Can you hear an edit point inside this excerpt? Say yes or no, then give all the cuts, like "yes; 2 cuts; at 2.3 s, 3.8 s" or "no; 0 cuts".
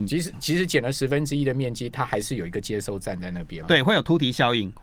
yes; 1 cut; at 3.6 s